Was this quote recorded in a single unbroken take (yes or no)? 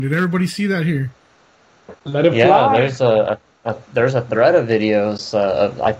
yes